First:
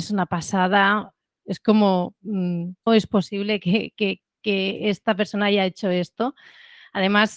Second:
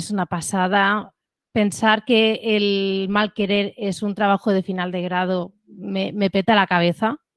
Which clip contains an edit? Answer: first; 2 cuts; at 1.4 s, 2.9 s

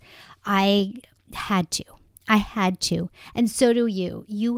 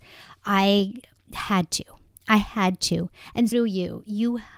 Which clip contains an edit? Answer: second; 1 cut; at 3.5 s

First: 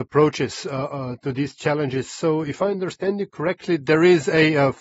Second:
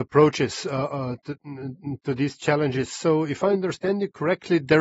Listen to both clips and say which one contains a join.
first; 1 cut; at 1.2 s

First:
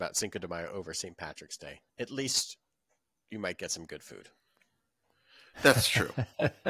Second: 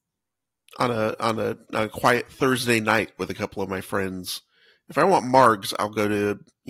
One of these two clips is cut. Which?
first; 1 cut; at 1.9 s

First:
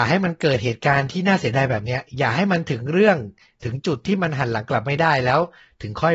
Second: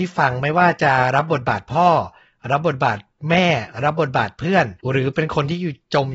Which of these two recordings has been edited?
second; 1 cut; at 4.8 s

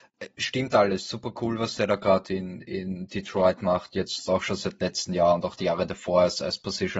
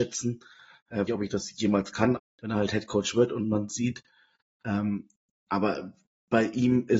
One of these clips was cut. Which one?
second; 2 cuts; at 1.1 s, 2.2 s

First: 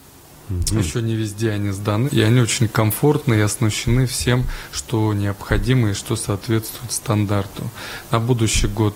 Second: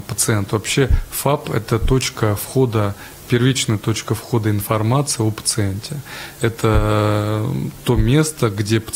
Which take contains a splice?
first; 1 cut; at 2.1 s

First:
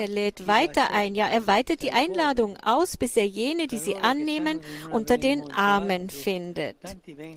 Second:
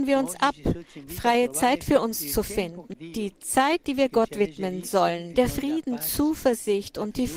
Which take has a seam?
second; 2 cuts; at 2.9 s, 5.3 s

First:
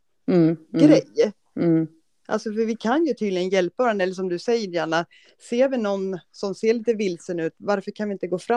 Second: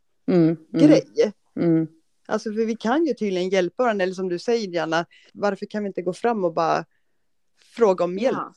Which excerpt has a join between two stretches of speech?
second; 1 cut; at 5.3 s

